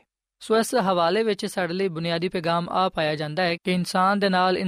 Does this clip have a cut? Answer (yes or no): yes